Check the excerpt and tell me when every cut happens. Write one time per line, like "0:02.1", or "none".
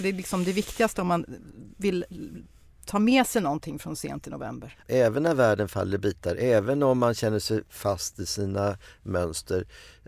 0:04.8